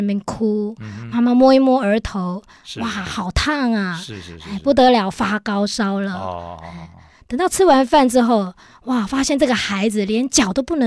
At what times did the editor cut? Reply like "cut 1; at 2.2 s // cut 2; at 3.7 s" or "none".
none